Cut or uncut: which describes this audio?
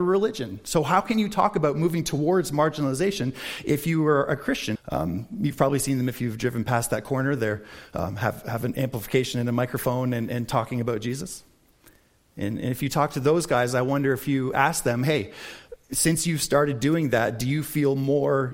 cut